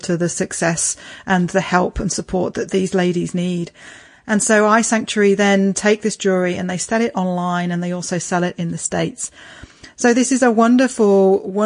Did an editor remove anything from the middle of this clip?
no; 0 cuts

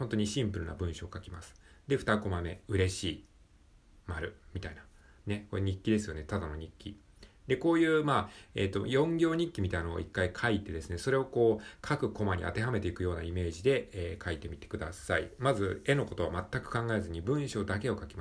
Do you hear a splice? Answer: no; 0 cuts

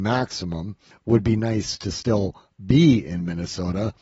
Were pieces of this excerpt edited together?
no; 0 cuts

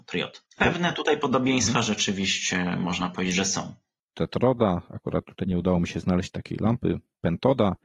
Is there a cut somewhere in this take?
yes; 2 cuts; at 4.1 s, 5.4 s

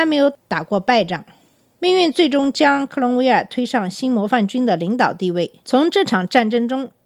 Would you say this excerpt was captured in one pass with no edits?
no; 2 cuts; at 1.8 s, 5.6 s

